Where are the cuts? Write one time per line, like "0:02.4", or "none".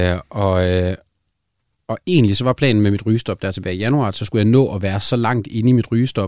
none